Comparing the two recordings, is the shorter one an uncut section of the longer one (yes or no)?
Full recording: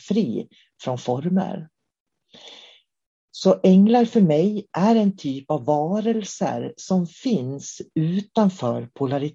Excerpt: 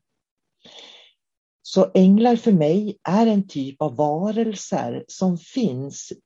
yes